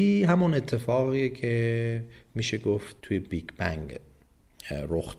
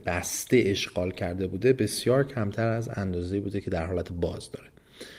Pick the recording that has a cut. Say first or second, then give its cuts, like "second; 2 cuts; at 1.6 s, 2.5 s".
first; 1 cut; at 3.0 s